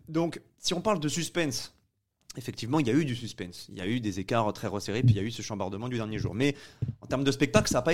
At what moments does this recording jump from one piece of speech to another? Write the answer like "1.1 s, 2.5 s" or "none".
none

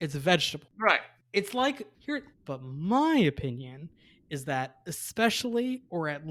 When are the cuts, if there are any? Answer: 1.2 s, 2.3 s

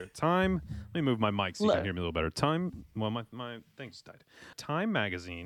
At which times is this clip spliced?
4.5 s

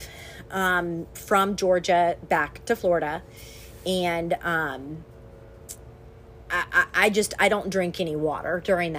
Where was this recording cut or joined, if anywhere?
none

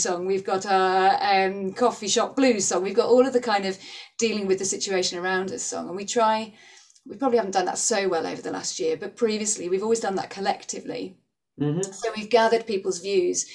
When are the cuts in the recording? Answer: none

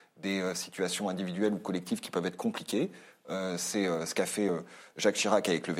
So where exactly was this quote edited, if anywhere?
none

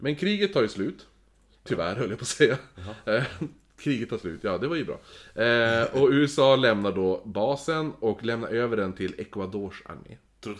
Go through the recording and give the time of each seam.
none

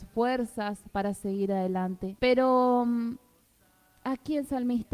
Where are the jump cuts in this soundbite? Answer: 2.2 s

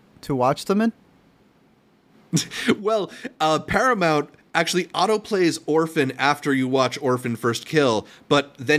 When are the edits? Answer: none

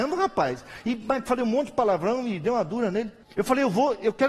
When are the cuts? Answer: 3.2 s

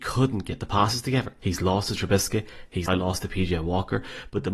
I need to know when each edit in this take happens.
1.4 s, 2.9 s

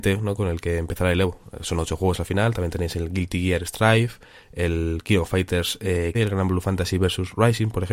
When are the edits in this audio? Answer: 6.1 s

